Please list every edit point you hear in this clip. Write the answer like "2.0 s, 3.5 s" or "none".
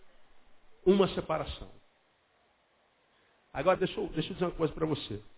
3.8 s